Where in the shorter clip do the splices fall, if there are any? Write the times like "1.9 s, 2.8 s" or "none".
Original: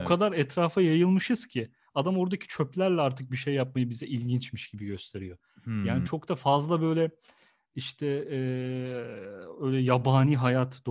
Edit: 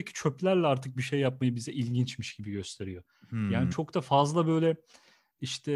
none